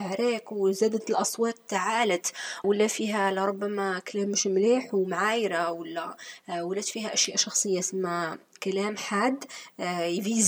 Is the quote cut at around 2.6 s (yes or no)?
yes